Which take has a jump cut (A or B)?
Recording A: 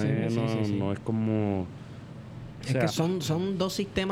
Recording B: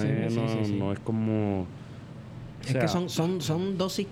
A